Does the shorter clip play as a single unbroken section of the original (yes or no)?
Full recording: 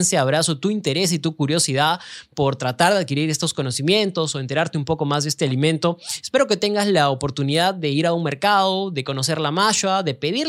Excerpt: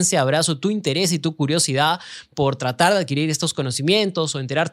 yes